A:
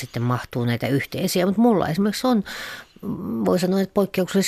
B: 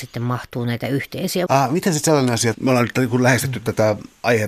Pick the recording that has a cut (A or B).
B